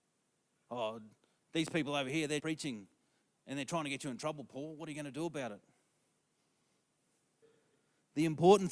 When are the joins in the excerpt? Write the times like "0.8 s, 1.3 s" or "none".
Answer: 2.4 s, 7.4 s